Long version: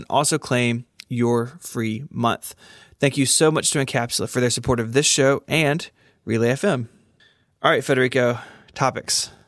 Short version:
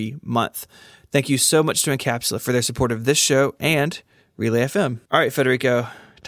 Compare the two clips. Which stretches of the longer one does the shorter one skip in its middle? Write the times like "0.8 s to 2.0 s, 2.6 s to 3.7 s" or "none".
6.9 s to 7.6 s